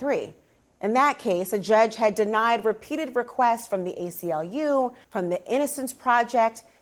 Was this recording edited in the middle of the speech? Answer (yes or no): yes